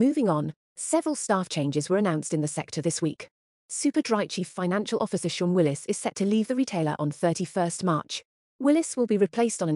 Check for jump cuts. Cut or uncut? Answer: uncut